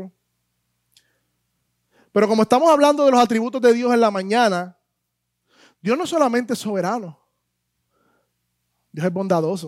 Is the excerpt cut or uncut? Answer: uncut